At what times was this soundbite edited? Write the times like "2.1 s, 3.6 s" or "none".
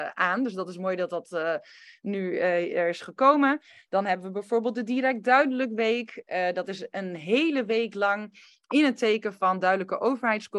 none